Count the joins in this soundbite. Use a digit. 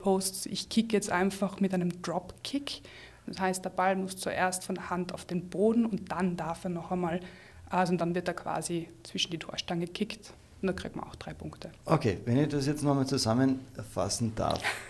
0